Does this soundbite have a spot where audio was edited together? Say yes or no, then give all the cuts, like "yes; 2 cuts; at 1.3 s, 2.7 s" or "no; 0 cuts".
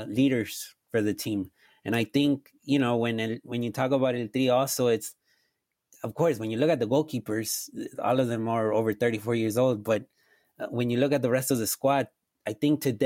no; 0 cuts